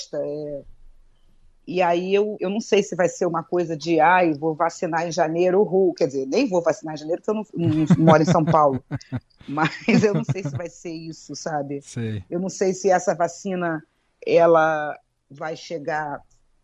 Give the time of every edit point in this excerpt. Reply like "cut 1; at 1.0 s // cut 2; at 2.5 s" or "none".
none